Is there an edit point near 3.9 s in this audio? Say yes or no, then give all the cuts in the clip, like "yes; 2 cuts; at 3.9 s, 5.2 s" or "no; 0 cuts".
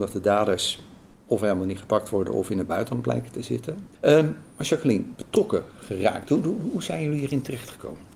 yes; 2 cuts; at 3.9 s, 5.1 s